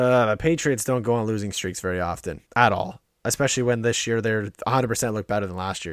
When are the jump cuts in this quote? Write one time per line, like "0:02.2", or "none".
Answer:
0:02.5